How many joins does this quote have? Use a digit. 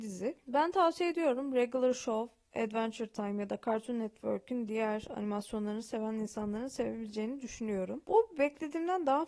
1